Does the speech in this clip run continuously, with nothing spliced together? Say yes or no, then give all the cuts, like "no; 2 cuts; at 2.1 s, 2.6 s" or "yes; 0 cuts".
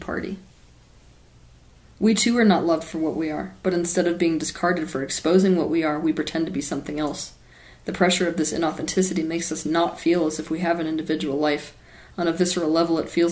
no; 1 cut; at 12.1 s